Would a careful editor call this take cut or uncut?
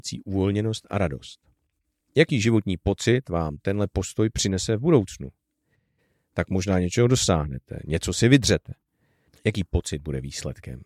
cut